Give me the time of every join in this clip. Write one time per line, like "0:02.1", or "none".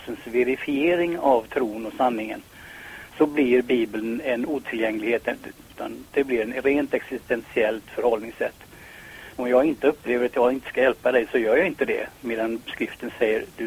0:05.7
0:09.3